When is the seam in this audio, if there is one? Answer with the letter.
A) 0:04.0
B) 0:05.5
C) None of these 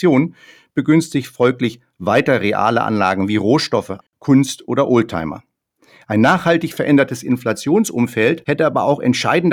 A